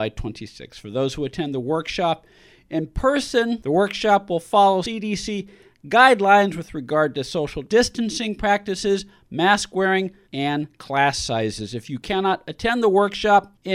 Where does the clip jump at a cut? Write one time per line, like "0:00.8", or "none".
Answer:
0:10.3